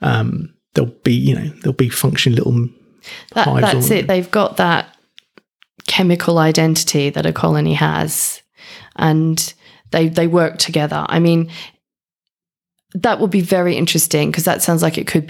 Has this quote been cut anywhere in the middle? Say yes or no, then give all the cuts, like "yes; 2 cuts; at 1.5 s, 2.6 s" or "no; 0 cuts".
no; 0 cuts